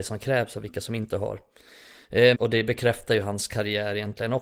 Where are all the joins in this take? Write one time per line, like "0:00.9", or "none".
0:02.3